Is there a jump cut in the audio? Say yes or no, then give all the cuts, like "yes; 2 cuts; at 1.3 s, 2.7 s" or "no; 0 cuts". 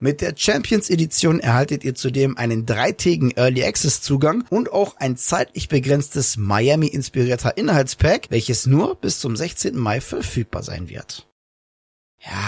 no; 0 cuts